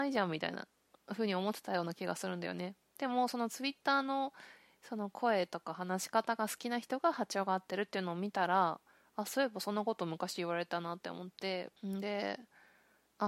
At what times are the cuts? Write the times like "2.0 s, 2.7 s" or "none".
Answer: 11.8 s